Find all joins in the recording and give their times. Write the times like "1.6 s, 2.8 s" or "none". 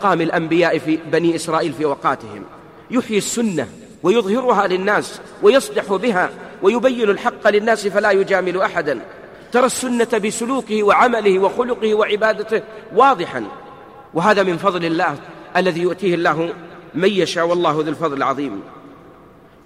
3.9 s, 14.1 s